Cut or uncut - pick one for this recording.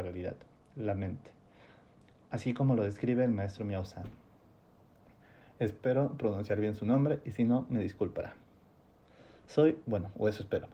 uncut